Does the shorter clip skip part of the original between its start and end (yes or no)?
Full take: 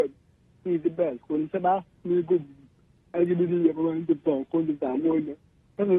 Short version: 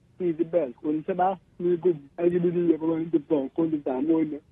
yes